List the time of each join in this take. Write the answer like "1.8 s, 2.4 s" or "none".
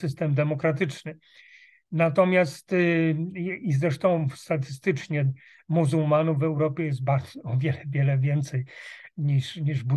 none